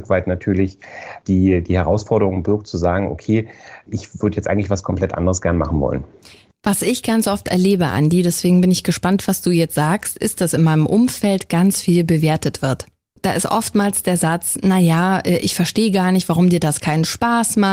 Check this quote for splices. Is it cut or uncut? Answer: uncut